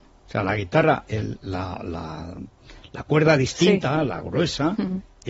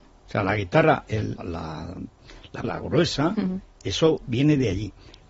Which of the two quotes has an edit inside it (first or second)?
second